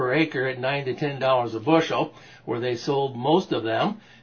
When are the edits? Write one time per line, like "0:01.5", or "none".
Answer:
none